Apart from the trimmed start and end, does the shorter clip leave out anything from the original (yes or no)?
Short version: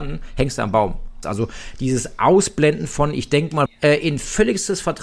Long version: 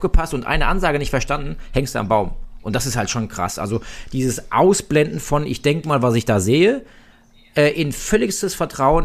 yes